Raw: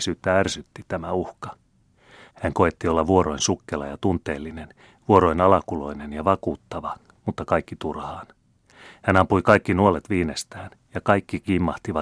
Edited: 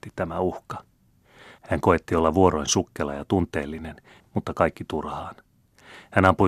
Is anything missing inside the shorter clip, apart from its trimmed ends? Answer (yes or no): yes